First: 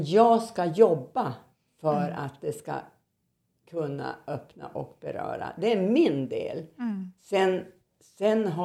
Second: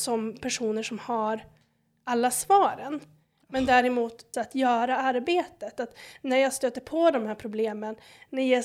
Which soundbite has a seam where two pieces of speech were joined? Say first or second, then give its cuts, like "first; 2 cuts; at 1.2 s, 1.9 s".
second; 1 cut; at 4.3 s